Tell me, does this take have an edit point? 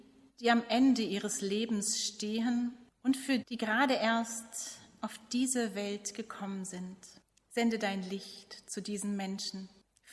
yes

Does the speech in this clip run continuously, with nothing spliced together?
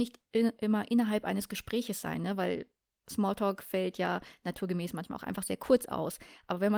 yes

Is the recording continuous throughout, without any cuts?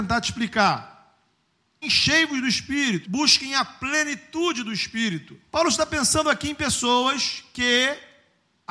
no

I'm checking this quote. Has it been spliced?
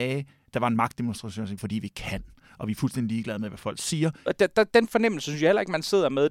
yes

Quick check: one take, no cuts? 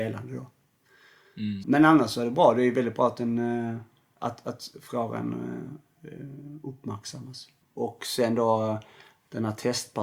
no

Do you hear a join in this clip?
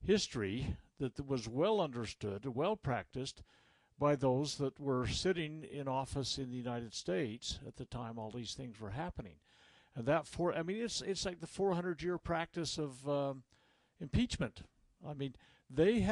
no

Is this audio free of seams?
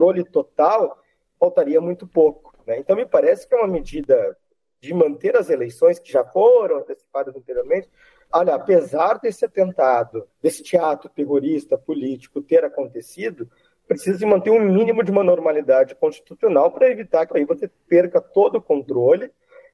no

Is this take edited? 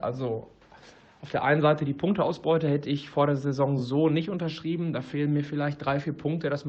no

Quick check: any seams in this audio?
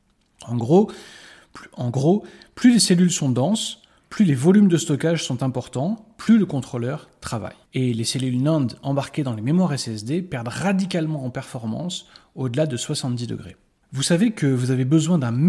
yes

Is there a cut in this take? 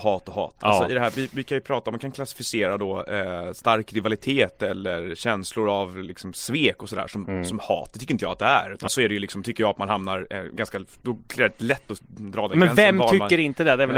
yes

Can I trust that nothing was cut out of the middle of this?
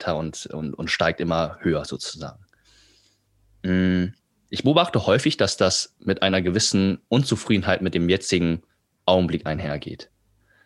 yes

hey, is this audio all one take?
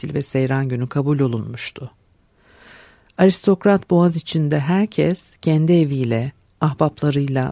yes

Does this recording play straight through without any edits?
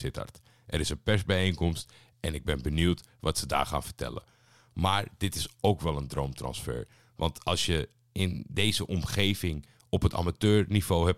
yes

